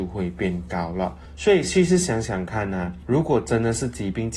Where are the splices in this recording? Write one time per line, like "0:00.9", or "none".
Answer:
none